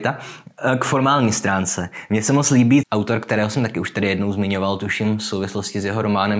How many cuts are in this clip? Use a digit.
1